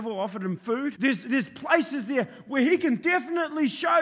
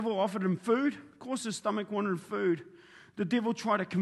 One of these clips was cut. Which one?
first; 1 cut; at 1.0 s

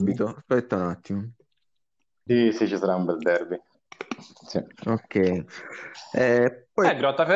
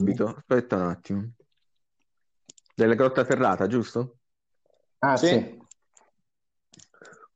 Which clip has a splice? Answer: first; 1 cut; at 2.3 s

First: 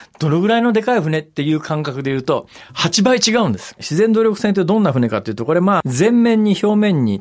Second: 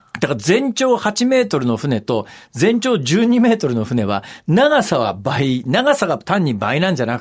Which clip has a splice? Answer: first; 2 cuts; at 3.8 s, 5.8 s

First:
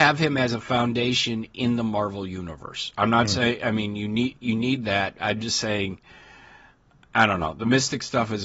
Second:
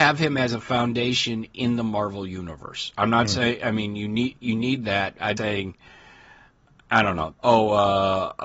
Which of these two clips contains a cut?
second; 2 cuts; at 5.4 s, 7.3 s

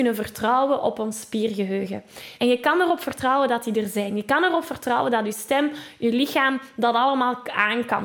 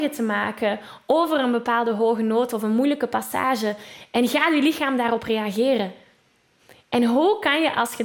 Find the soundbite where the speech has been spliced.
first; 1 cut; at 2.4 s

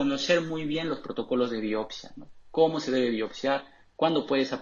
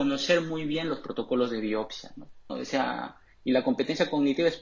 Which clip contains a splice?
second; 1 cut; at 2.5 s

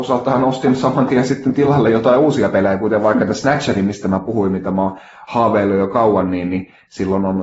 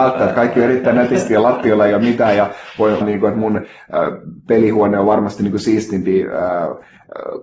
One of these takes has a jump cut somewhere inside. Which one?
second; 1 cut; at 3.0 s

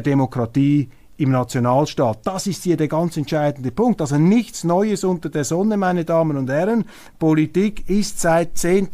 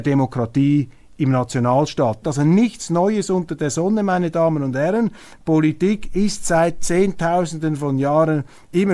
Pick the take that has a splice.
second; 1 cut; at 2.2 s

